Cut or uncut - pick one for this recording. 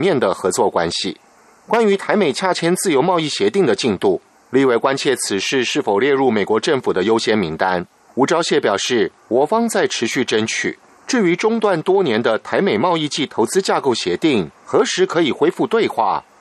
uncut